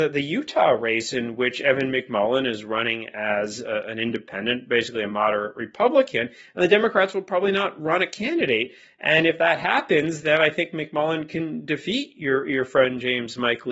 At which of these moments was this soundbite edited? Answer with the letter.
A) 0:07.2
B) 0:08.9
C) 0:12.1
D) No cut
D